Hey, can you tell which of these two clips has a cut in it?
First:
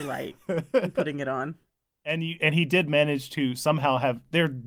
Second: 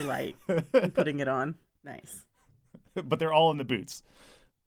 second; 1 cut; at 1.8 s

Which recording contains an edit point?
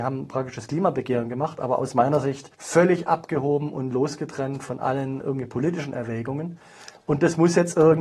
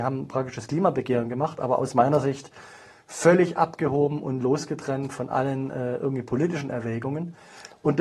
first; 2 cuts; at 2.5 s, 5.2 s

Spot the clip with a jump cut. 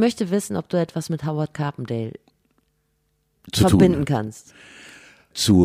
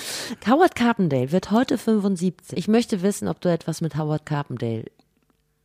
second; 1 cut; at 2.5 s

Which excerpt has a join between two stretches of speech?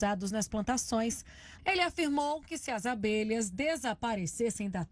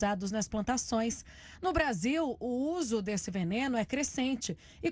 first; 1 cut; at 1.6 s

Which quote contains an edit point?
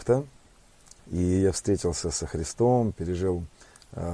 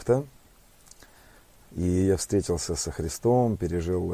first; 2 cuts; at 1.0 s, 2.9 s

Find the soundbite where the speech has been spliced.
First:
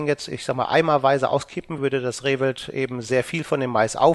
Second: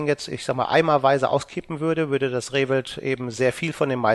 first; 1 cut; at 1.8 s

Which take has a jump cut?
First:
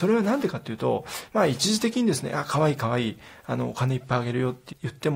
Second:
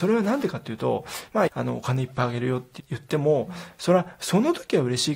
second; 1 cut; at 1.5 s

